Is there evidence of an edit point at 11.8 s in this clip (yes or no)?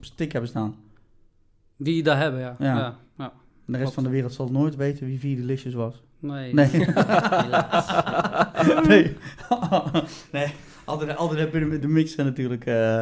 yes